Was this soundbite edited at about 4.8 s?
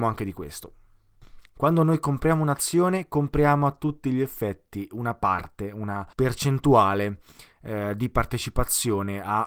no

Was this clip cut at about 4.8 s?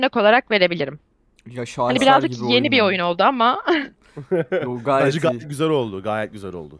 no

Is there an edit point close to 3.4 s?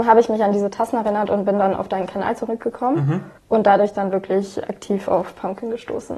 yes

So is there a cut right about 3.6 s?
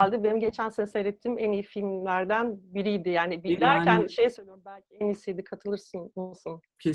yes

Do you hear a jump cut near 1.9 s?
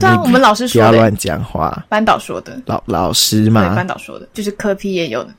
no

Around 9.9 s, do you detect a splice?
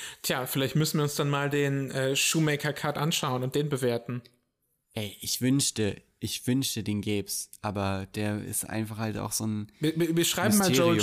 no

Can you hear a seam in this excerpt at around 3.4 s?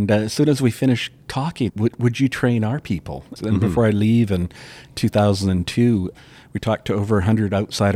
yes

